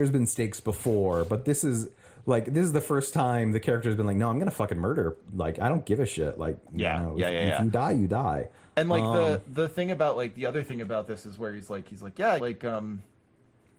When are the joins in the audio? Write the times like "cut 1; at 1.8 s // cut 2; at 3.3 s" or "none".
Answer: cut 1; at 12.4 s